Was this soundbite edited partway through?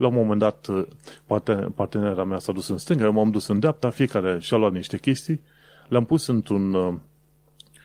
no; 0 cuts

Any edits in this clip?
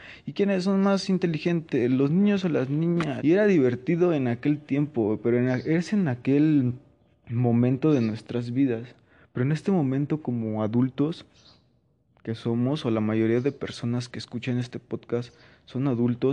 yes; 1 cut; at 3.2 s

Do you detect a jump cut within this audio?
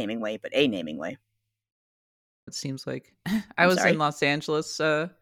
yes; 1 cut; at 2.5 s

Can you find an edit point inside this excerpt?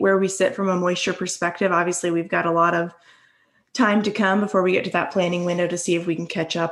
no; 0 cuts

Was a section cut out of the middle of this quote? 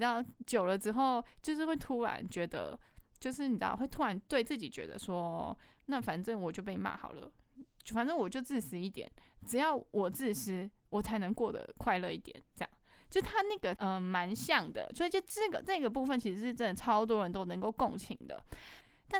yes; 2 cuts; at 13.7 s, 14.9 s

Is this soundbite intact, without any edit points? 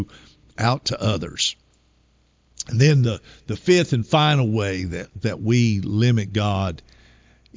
yes; 0 cuts

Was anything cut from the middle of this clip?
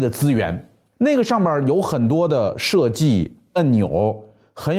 yes; 1 cut; at 0.9 s

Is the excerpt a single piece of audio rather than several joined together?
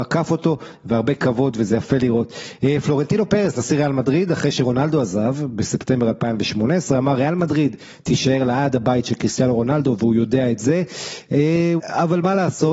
no; 1 cut; at 11.8 s

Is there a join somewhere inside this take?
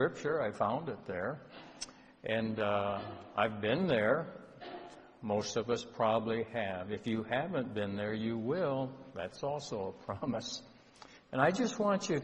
yes; 1 cut; at 11.2 s

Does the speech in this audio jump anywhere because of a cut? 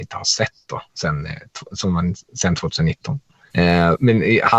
yes; 1 cut; at 3.5 s

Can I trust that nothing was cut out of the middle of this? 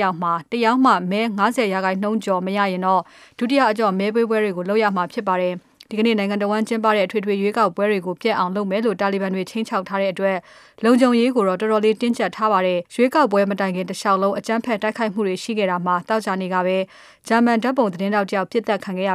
no; 1 cut; at 12.9 s

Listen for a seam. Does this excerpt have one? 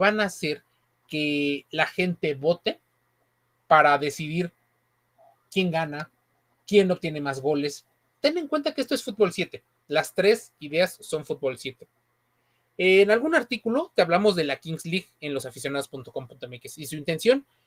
no; 0 cuts

